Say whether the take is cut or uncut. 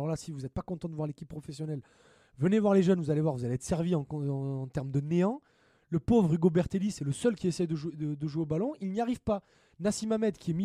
uncut